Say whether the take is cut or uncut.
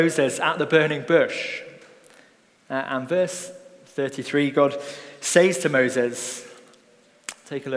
uncut